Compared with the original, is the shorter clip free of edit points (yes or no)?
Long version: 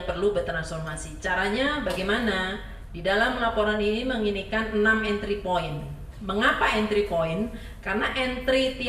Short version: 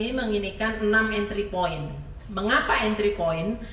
yes